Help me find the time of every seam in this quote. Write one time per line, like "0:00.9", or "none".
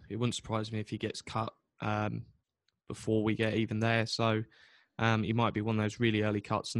none